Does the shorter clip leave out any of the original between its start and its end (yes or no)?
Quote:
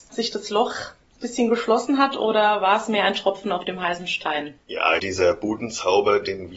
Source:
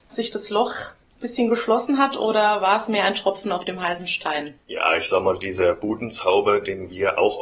yes